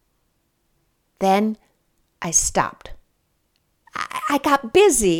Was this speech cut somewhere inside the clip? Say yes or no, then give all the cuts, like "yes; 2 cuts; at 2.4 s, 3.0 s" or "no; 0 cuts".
no; 0 cuts